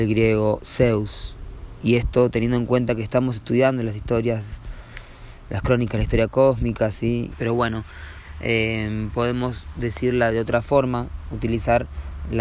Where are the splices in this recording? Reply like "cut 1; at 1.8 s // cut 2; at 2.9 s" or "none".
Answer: cut 1; at 7.3 s